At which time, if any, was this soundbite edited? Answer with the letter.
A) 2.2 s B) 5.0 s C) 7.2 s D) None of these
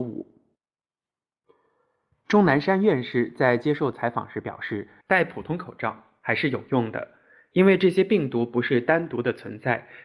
B